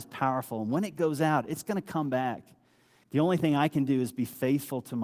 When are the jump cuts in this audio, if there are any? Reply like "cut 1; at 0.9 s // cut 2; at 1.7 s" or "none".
cut 1; at 3.0 s

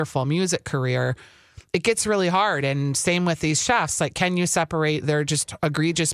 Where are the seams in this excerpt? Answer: none

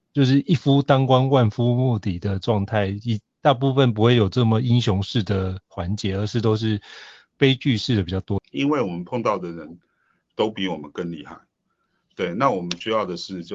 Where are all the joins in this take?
cut 1; at 8.4 s

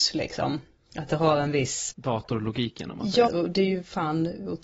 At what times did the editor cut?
cut 1; at 1.9 s // cut 2; at 3.3 s

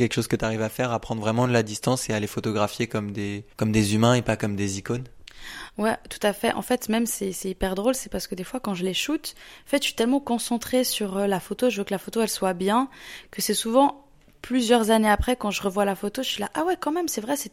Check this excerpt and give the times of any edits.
cut 1; at 3.5 s

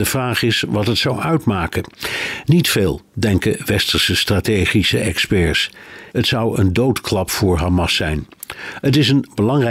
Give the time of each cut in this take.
cut 1; at 6.1 s

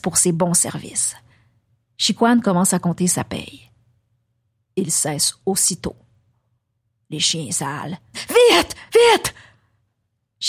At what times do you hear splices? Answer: cut 1; at 8.1 s

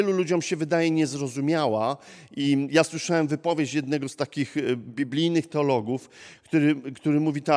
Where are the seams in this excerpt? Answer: none

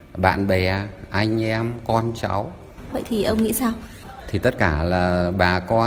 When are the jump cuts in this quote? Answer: cut 1; at 2.9 s // cut 2; at 4.0 s

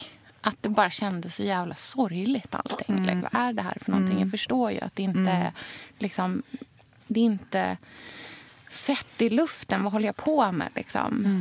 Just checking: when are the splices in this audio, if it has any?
cut 1; at 3.2 s

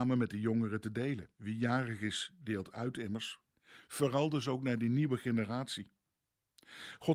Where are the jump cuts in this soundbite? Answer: cut 1; at 1.3 s

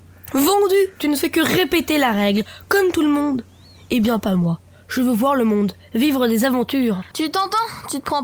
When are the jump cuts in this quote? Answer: cut 1; at 7.1 s

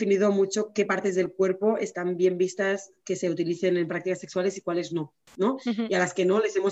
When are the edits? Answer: none

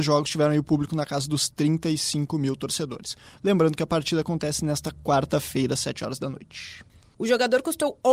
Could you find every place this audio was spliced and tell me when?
cut 1; at 7.1 s

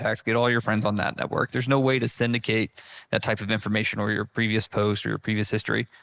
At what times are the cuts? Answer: cut 1; at 1.5 s

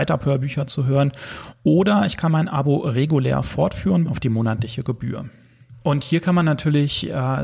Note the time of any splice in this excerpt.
cut 1; at 4.1 s

